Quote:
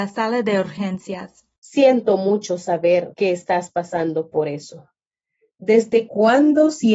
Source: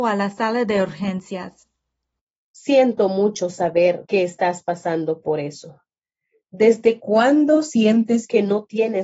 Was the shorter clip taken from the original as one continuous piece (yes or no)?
no